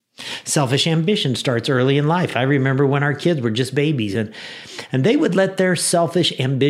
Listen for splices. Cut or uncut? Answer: uncut